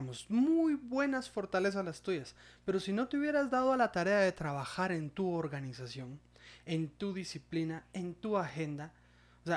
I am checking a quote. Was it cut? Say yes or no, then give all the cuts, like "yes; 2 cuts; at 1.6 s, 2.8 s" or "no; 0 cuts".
no; 0 cuts